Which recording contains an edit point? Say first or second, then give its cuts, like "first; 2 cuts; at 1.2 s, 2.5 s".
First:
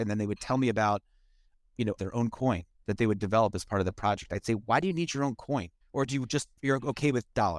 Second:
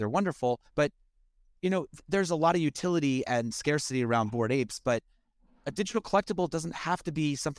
first; 2 cuts; at 2.0 s, 5.8 s